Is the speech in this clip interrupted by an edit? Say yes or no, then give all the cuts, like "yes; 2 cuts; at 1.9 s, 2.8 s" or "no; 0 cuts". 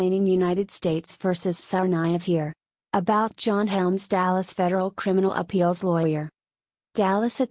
no; 0 cuts